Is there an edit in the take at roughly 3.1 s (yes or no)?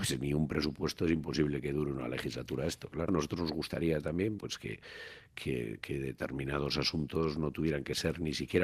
yes